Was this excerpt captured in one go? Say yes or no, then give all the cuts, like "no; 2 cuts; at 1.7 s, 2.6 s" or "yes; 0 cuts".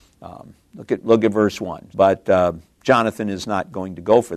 no; 1 cut; at 1.9 s